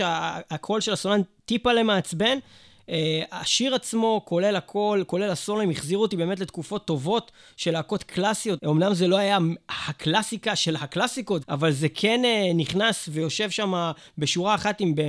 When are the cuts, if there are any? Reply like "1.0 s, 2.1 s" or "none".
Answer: 8.6 s, 11.4 s